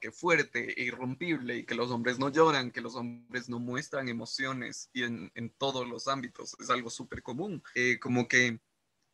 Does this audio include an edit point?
no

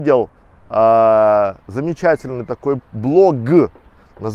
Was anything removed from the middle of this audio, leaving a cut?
yes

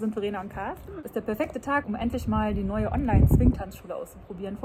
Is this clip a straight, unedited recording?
no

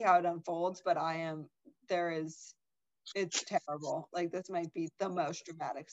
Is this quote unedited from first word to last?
yes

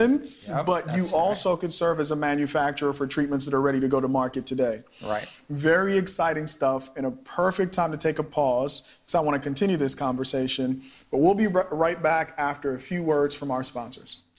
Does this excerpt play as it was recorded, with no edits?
yes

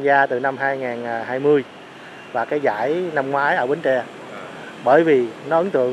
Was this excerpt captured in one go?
yes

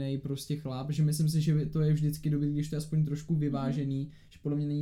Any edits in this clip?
no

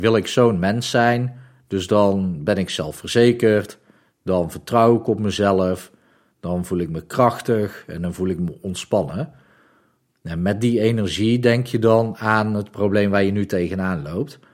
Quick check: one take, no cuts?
yes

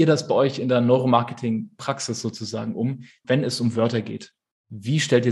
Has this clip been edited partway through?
yes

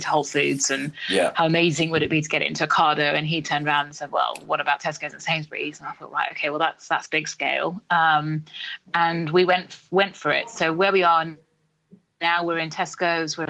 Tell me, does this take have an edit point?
no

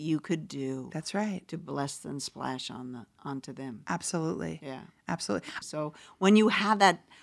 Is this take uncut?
no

